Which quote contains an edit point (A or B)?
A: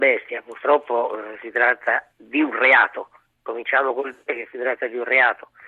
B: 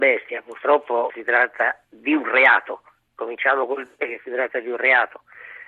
B